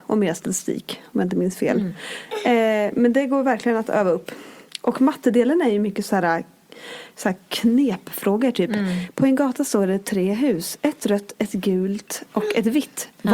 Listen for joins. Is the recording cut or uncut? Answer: uncut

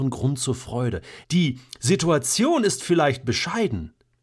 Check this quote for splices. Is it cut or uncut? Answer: cut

